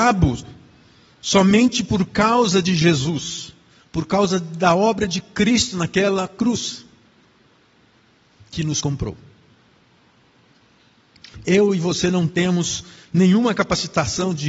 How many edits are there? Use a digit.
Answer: 1